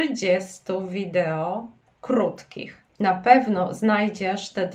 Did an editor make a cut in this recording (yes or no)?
yes